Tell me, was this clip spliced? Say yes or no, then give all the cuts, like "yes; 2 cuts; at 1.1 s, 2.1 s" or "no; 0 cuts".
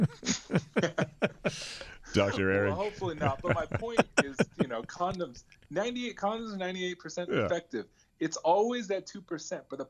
no; 0 cuts